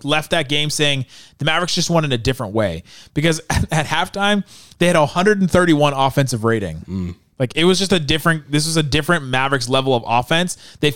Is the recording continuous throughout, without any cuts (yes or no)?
yes